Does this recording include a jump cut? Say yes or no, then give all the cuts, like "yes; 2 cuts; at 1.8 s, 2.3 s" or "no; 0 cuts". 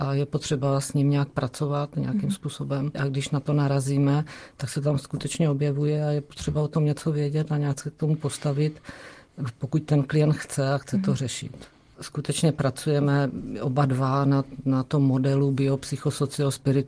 yes; 1 cut; at 11.9 s